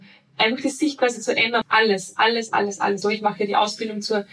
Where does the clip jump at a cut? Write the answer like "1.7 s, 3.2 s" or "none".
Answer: 1.6 s, 3.0 s